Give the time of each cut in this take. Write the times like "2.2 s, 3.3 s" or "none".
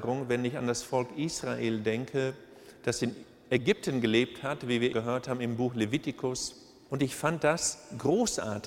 4.9 s, 6.9 s